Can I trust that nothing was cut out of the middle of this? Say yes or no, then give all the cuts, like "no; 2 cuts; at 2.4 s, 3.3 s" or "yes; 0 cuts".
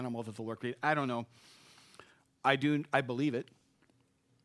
yes; 0 cuts